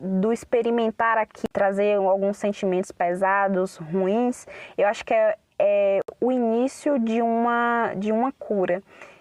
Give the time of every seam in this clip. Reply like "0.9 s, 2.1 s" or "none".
1.5 s